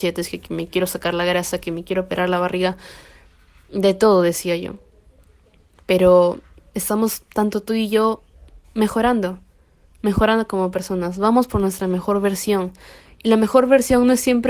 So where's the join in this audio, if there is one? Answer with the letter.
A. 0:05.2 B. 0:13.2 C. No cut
C